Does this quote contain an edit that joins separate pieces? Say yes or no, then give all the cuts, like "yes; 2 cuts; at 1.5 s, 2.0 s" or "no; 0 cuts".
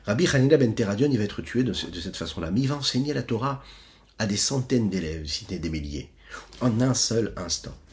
yes; 1 cut; at 6.5 s